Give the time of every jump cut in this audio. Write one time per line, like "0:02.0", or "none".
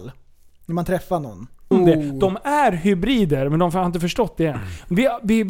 0:01.7